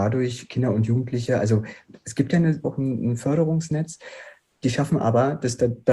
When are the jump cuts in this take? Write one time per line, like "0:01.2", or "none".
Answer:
0:02.6